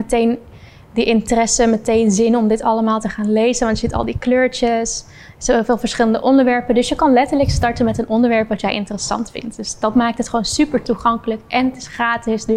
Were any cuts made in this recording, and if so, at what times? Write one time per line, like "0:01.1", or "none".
none